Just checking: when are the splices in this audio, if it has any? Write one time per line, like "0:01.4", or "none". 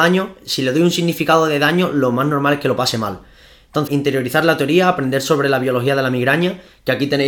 0:03.9